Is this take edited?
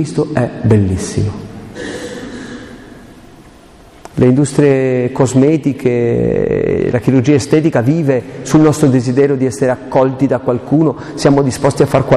yes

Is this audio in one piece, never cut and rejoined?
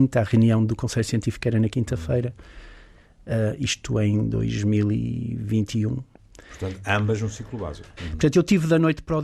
no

